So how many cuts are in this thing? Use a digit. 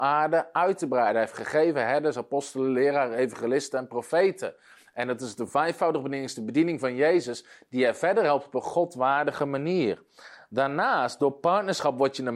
0